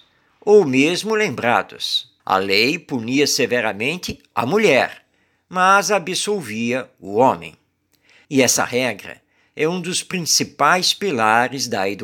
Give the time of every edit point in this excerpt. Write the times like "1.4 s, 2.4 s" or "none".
2.2 s, 8.2 s